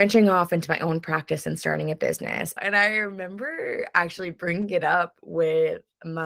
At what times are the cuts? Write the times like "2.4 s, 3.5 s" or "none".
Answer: 2.6 s